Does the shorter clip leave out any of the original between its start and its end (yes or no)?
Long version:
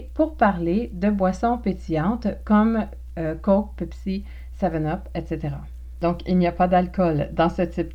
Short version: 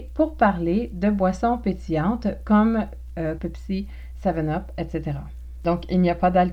yes